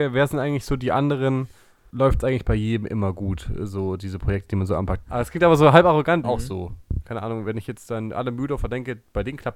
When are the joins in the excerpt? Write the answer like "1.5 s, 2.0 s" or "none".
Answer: 1.9 s, 5.0 s, 6.2 s